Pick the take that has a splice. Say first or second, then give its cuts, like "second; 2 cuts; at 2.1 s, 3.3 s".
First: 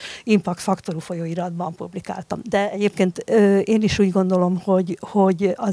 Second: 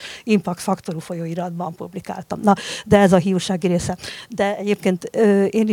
first; 1 cut; at 2.4 s